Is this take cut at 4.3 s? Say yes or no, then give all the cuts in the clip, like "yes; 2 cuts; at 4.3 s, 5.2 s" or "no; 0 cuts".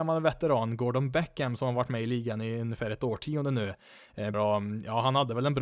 yes; 1 cut; at 4.3 s